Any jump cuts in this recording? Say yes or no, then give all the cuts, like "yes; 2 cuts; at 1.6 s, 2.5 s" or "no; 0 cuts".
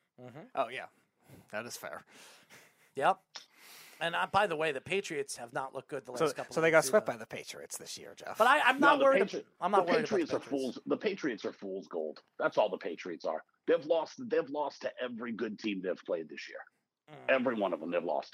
no; 0 cuts